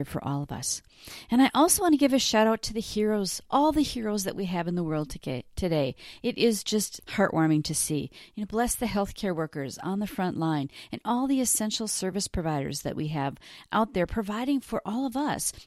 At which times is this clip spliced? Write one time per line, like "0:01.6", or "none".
0:07.0